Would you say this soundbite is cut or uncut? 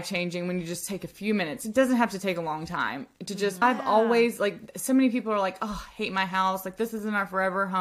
cut